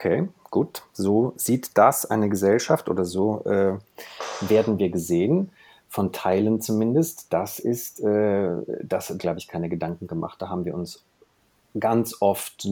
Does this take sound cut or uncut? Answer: cut